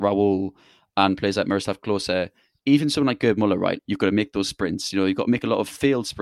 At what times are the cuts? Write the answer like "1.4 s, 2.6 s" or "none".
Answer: 3.8 s